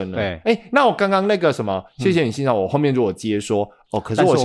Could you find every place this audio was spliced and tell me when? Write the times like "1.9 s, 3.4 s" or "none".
none